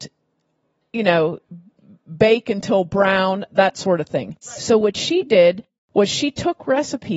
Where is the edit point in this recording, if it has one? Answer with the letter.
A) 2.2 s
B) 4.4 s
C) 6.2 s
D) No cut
B